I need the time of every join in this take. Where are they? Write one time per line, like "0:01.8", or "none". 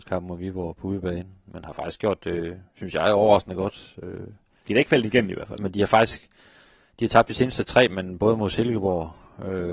0:05.6